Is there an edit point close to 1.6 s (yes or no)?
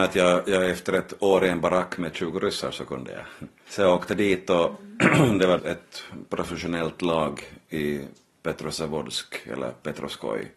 no